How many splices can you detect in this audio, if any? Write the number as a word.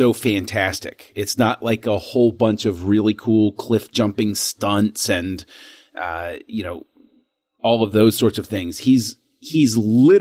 zero